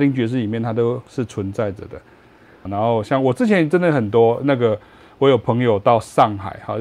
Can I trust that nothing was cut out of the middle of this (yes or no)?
no